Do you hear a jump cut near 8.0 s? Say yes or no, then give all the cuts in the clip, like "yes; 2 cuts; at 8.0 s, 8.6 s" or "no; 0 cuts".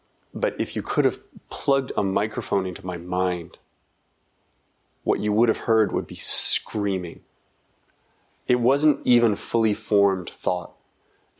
no; 0 cuts